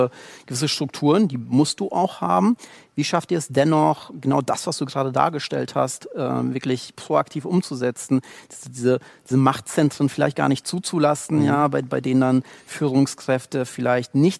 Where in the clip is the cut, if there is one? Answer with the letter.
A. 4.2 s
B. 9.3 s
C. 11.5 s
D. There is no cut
D